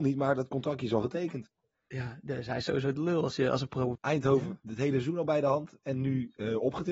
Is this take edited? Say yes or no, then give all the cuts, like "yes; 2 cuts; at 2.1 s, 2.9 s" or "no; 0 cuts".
yes; 1 cut; at 3.9 s